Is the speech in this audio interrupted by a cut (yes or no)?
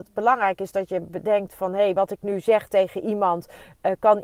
no